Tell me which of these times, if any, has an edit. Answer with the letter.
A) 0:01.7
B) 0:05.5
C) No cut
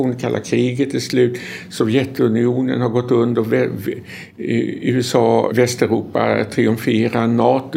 B